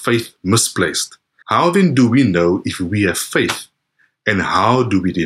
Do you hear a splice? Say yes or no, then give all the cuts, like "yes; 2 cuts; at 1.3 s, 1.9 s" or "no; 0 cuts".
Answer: yes; 1 cut; at 1.4 s